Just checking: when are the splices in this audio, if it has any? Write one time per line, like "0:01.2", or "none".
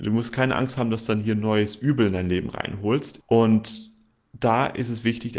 0:03.2